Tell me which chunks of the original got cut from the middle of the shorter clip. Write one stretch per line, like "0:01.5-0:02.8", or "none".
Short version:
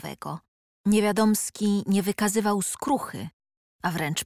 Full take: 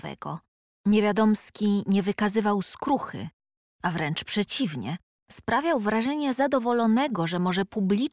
none